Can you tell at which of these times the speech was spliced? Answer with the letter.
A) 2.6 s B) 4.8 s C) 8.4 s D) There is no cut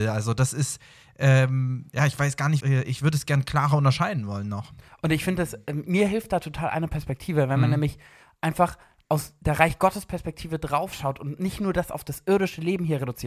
A